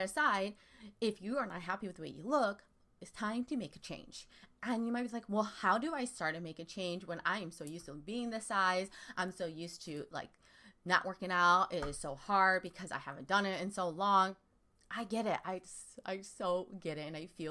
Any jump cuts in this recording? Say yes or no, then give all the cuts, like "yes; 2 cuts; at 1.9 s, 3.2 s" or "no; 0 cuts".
no; 0 cuts